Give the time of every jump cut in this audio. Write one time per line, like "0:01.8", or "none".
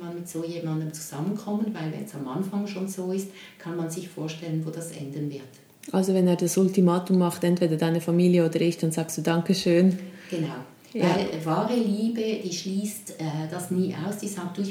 none